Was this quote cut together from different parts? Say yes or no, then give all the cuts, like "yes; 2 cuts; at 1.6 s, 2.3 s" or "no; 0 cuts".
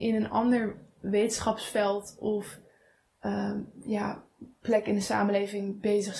no; 0 cuts